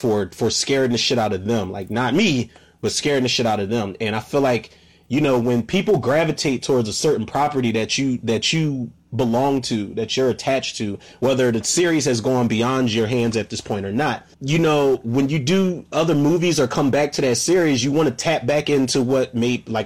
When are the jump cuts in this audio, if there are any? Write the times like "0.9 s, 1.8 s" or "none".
14.3 s